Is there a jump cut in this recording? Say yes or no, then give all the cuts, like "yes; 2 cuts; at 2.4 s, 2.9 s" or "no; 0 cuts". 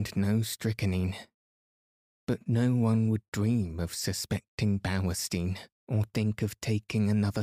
yes; 1 cut; at 5.8 s